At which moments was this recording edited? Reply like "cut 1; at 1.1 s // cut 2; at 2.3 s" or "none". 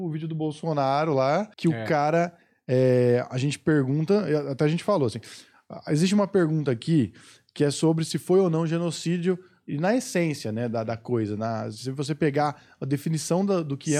cut 1; at 1.5 s